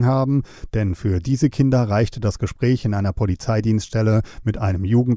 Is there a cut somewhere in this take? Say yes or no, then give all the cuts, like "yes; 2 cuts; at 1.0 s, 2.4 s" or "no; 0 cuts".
no; 0 cuts